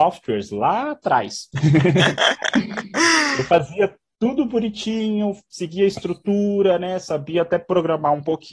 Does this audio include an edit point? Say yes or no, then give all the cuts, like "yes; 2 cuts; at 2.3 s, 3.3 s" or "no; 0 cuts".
yes; 1 cut; at 1.5 s